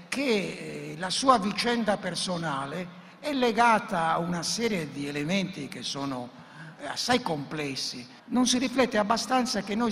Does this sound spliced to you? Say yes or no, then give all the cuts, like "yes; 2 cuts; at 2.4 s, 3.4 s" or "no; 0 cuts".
yes; 1 cut; at 8.2 s